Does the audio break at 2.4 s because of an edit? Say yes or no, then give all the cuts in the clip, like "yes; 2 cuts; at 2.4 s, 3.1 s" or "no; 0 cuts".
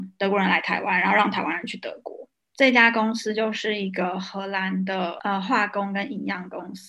yes; 1 cut; at 2.4 s